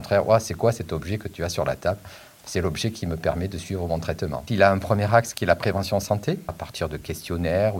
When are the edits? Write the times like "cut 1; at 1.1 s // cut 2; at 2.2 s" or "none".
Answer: cut 1; at 4.5 s // cut 2; at 6.5 s